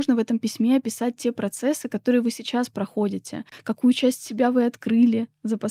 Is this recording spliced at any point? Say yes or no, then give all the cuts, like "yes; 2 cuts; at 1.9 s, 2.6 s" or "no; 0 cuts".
no; 0 cuts